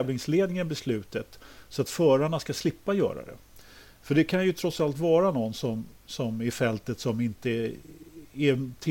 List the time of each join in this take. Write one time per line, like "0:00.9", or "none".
none